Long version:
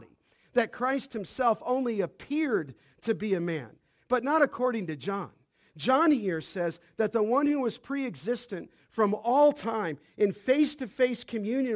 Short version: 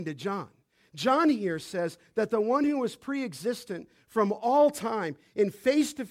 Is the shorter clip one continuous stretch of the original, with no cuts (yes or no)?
yes